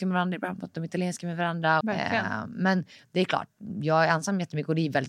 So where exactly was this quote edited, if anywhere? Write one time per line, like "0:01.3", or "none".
0:01.8

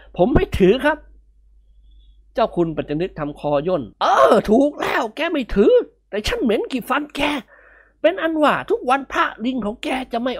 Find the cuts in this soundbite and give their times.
0:03.9

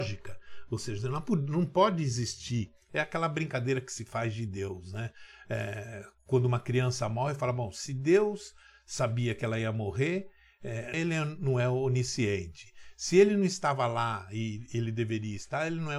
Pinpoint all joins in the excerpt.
0:10.9

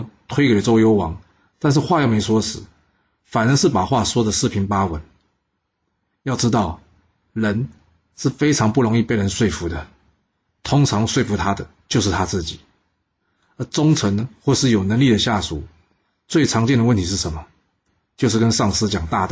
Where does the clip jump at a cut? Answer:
none

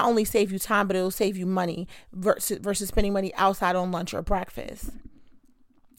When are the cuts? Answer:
none

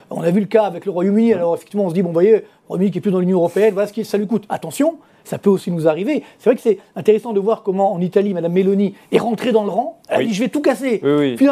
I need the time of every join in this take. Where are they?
none

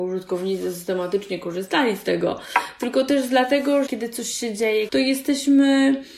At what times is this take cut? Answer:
0:03.9
0:04.9

